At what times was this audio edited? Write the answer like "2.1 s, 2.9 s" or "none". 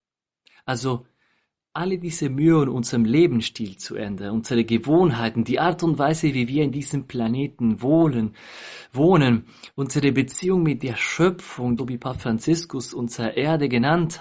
11.8 s